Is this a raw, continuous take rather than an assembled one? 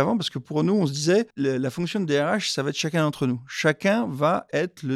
no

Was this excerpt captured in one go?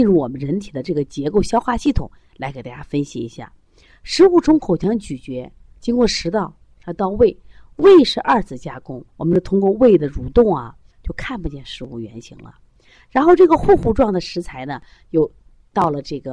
no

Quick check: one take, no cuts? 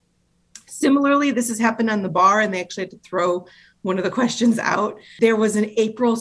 yes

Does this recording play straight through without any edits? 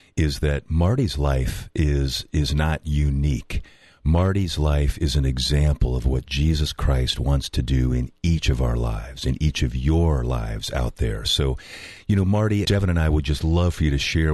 no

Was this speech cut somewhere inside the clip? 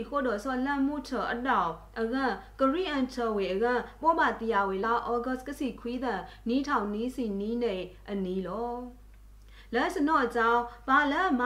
yes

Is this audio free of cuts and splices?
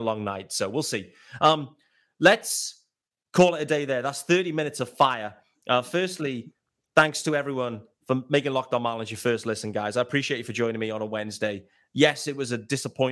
yes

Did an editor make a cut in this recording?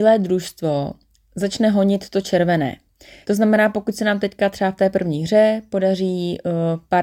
yes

